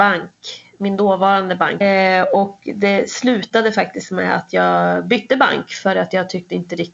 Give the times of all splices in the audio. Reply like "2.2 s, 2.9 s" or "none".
1.8 s

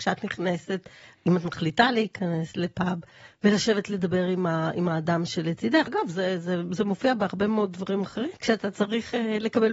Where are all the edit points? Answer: 5.9 s, 8.4 s

